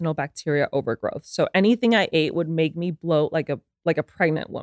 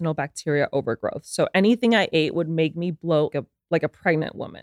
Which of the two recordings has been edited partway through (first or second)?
second